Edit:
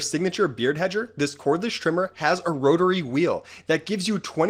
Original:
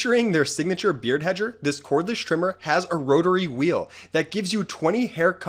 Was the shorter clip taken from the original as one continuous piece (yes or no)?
yes